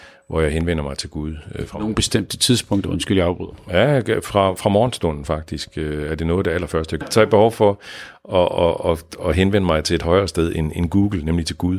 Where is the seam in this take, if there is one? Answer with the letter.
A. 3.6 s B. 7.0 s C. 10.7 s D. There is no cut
B